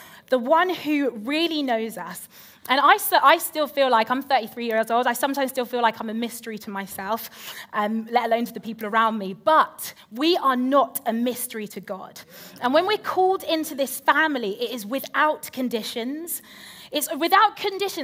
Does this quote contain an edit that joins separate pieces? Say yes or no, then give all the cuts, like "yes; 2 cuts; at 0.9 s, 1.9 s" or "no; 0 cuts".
no; 0 cuts